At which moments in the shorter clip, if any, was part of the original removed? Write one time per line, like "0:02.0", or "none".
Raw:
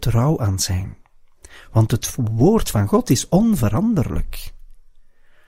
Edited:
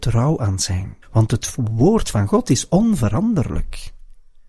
0:01.0

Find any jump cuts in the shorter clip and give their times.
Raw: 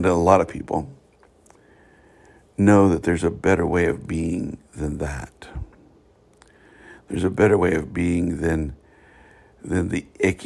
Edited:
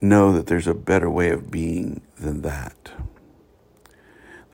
none

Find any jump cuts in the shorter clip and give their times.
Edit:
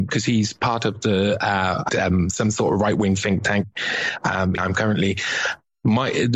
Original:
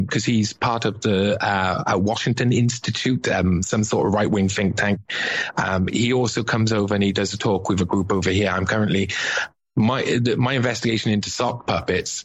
0:01.9
0:04.6

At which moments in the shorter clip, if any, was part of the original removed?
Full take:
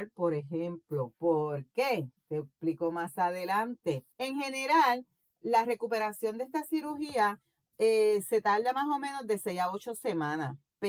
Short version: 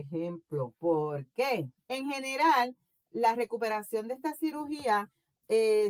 0:01.8

